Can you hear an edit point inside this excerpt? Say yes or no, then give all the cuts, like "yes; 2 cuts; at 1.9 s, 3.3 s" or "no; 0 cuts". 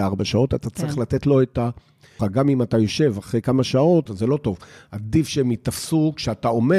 yes; 2 cuts; at 2.2 s, 4.1 s